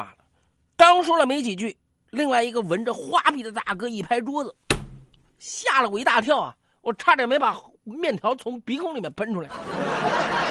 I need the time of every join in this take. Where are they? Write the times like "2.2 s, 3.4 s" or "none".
none

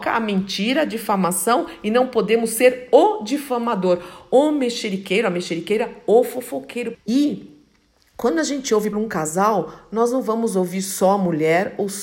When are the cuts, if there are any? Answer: 6.9 s, 8.9 s

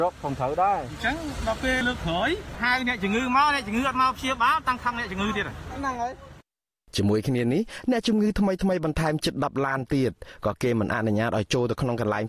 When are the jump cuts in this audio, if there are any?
1.8 s

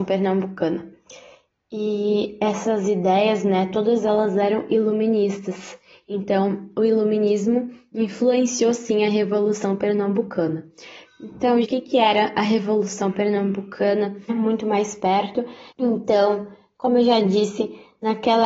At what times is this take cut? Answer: 11.6 s, 14.3 s, 15.7 s

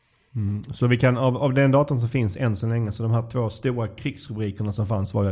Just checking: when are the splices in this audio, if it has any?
none

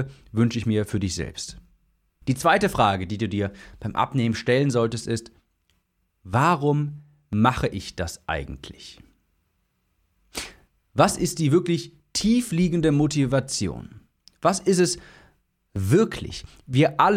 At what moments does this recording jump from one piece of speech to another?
2.2 s

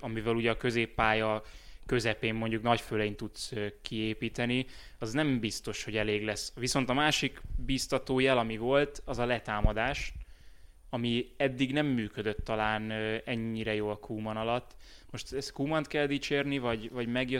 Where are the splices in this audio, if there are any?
none

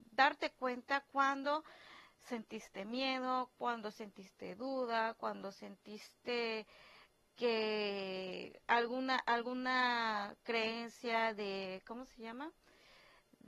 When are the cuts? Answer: none

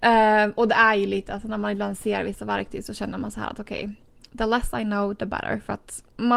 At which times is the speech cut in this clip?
none

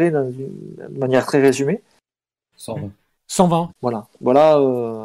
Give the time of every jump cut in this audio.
2.5 s, 3.7 s

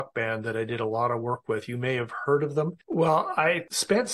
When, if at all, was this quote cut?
2.8 s

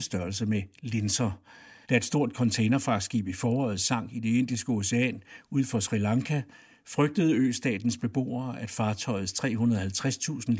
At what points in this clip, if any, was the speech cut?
1.8 s

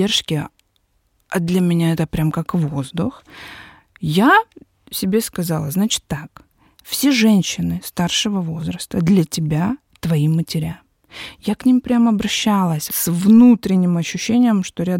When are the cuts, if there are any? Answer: 12.9 s

